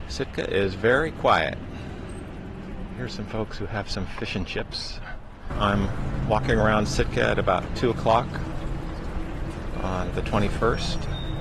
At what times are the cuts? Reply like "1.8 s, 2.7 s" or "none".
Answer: 5.5 s, 10.1 s

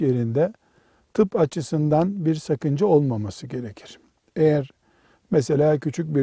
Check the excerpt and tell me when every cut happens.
none

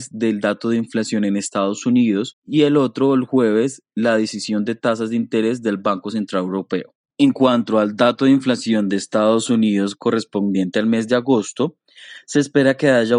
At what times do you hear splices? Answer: 7.1 s

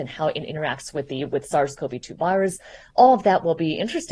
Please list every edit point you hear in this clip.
none

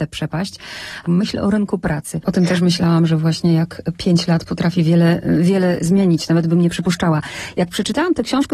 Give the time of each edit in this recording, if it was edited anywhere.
1.0 s, 2.2 s

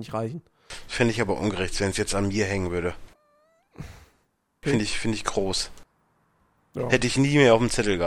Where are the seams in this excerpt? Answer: 4.6 s

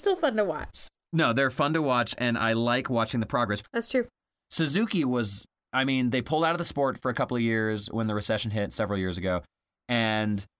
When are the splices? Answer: 3.6 s

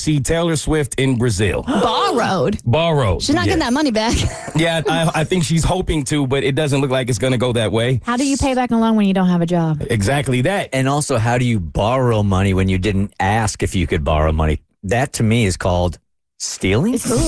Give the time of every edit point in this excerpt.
4.8 s

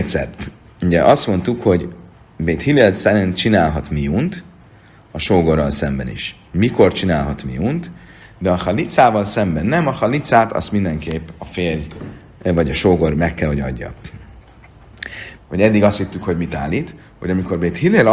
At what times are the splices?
8.2 s, 15.4 s

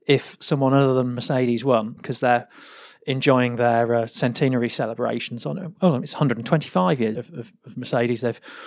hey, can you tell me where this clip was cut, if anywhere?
2.0 s, 7.1 s

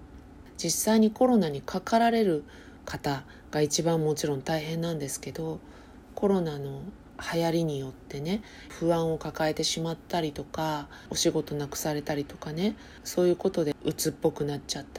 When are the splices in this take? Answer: none

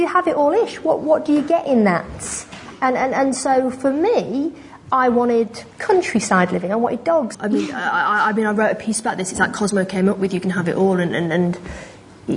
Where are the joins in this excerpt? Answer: 5.7 s, 7.3 s

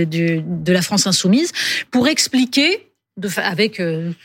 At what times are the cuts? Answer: none

